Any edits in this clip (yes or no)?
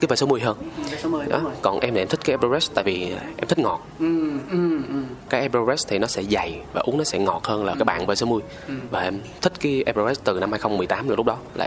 no